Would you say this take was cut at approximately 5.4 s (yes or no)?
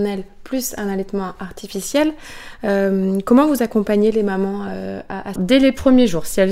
yes